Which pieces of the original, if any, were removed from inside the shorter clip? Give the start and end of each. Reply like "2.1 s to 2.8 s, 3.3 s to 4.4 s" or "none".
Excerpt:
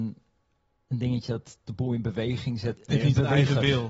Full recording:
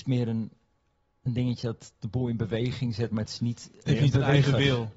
3.1 s to 3.7 s